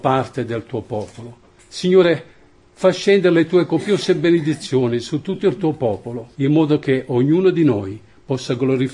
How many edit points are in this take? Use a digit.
2